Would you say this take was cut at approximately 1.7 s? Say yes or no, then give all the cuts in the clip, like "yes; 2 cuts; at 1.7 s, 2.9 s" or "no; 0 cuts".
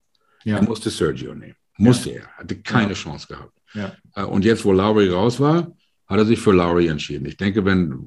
no; 0 cuts